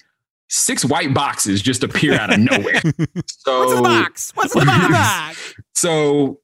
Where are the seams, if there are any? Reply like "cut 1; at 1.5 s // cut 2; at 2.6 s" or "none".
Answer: cut 1; at 2.8 s